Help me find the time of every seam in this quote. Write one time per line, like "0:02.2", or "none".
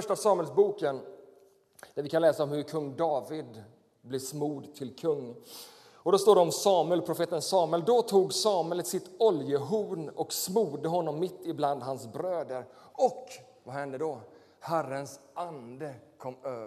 none